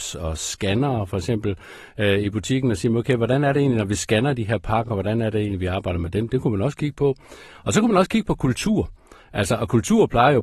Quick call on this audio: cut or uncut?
uncut